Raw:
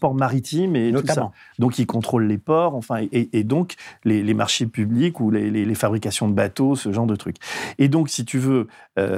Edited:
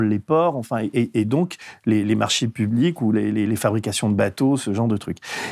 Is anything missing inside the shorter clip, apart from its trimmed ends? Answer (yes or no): no